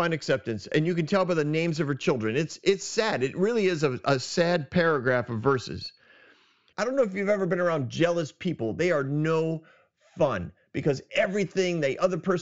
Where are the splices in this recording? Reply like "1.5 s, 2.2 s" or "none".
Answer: 6.7 s